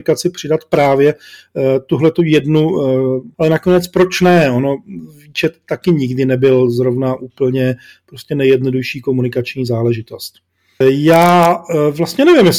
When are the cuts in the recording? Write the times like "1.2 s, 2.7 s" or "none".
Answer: 3.3 s, 10.8 s